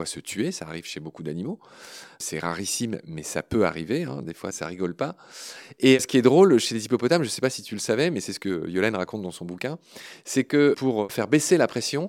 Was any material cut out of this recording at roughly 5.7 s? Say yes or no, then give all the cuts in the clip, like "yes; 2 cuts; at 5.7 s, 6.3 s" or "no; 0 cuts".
no; 0 cuts